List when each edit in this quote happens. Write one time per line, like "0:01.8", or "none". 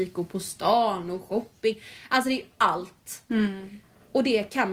none

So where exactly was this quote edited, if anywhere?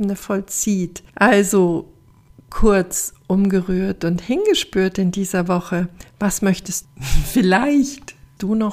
0:01.1

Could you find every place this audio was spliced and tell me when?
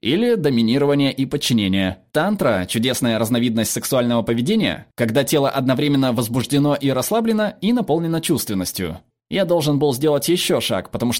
0:02.1

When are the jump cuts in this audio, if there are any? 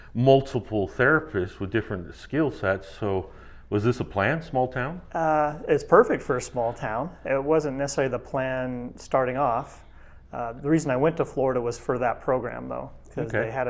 none

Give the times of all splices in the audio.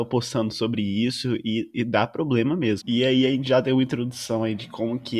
0:02.8

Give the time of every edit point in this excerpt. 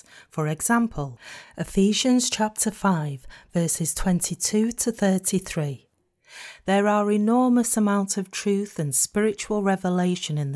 none

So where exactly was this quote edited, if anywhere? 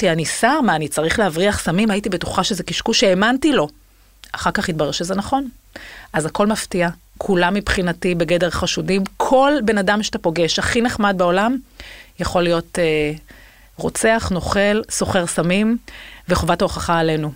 none

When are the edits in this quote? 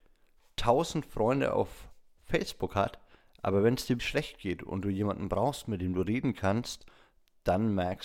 0:04.0

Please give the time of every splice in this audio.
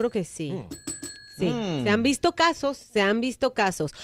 none

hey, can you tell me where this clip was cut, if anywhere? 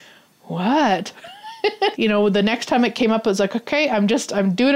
0:01.9

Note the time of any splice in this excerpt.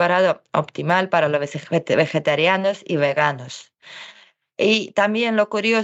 none

